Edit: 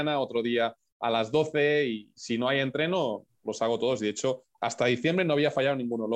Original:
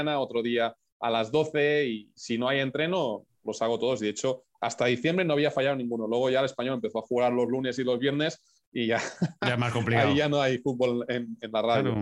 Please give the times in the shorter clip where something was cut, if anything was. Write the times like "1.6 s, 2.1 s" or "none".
none

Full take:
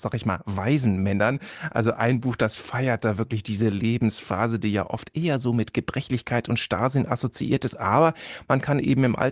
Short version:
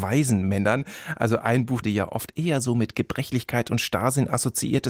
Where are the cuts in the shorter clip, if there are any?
1.8 s

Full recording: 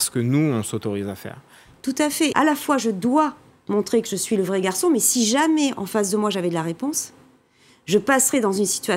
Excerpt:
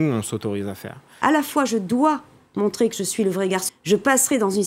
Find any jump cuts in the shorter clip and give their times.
1.2 s, 3.7 s

